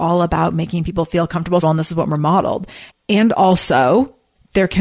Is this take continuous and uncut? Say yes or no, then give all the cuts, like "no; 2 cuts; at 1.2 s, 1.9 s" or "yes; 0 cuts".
no; 2 cuts; at 1.6 s, 2.9 s